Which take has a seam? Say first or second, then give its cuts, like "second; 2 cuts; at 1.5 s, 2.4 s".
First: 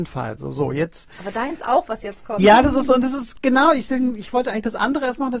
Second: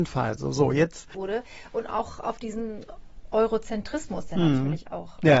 second; 1 cut; at 1.1 s